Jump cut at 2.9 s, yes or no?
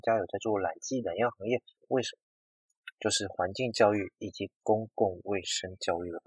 yes